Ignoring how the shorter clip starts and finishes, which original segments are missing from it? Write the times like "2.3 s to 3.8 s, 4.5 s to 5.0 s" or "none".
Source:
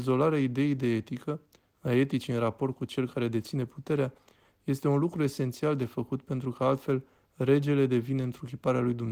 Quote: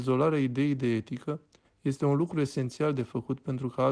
1.6 s to 4.5 s